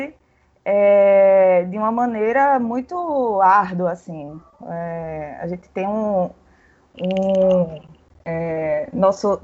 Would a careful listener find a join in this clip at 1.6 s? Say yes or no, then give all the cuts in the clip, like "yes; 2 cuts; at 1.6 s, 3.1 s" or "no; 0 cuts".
no; 0 cuts